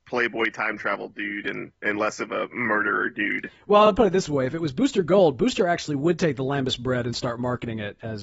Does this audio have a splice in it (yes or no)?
no